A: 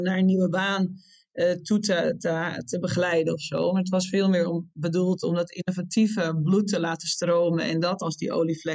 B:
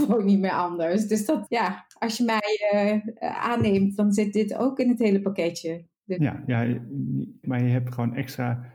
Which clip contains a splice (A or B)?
B